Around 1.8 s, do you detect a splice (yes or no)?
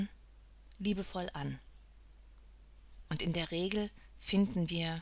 no